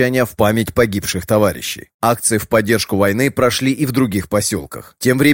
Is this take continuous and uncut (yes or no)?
yes